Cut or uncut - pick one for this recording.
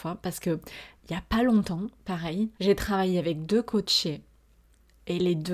cut